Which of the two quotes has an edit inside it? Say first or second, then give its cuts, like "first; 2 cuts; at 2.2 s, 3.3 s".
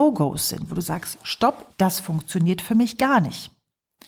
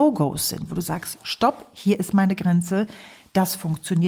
first; 1 cut; at 1.7 s